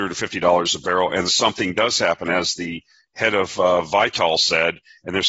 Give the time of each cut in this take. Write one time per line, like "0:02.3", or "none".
0:01.3